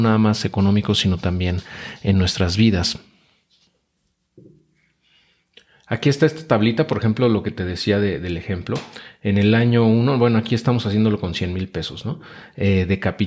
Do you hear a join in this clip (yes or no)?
no